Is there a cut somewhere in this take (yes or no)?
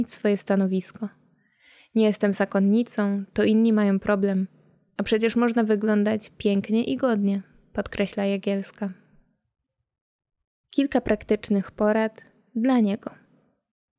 no